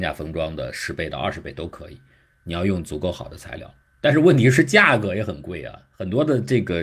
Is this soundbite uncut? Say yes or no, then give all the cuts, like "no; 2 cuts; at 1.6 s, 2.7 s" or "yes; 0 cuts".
yes; 0 cuts